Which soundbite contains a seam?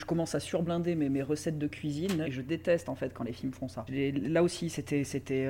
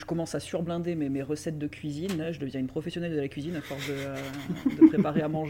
first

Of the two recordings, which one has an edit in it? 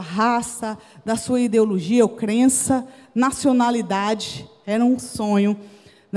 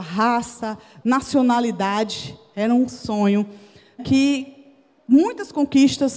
second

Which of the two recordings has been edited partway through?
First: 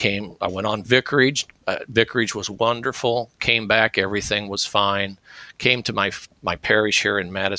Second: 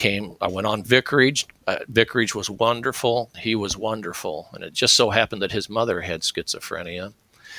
second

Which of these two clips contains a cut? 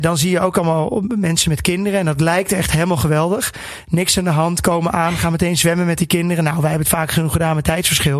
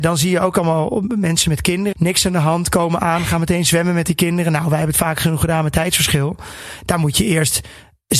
second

